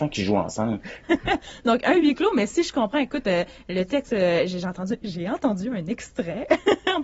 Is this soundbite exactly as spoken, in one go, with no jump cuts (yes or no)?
no